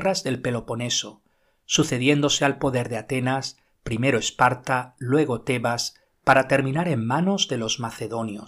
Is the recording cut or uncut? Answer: uncut